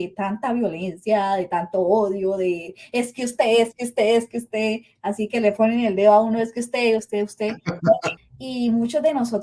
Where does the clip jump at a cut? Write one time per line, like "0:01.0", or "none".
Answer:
0:07.0
0:08.2